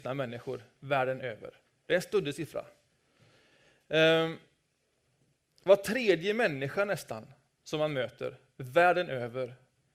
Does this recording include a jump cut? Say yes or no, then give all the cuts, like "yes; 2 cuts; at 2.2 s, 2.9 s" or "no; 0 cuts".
no; 0 cuts